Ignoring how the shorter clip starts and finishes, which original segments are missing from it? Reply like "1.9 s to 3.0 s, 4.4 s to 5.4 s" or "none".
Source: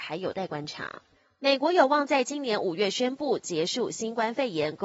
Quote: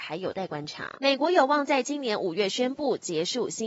0.9 s to 1.4 s